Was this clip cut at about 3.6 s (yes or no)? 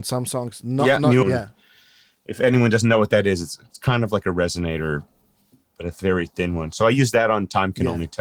no